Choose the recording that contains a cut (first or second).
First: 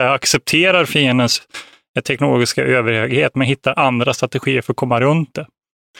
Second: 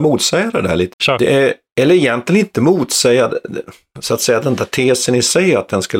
second